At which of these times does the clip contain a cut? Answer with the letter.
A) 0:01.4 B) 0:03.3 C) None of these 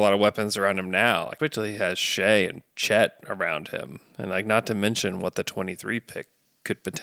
A